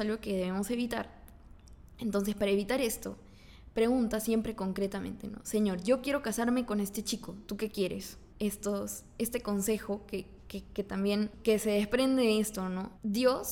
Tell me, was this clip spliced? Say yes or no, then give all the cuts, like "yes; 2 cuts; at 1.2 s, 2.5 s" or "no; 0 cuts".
yes; 1 cut; at 8.3 s